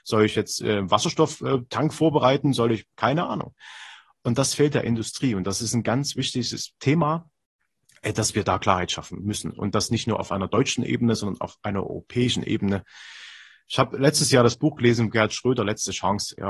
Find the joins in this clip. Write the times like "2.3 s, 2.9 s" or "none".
none